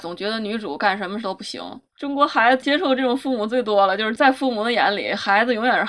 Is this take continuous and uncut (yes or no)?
yes